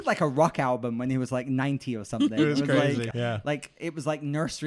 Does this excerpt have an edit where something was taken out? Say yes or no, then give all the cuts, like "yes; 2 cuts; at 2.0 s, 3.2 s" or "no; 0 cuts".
yes; 1 cut; at 3.1 s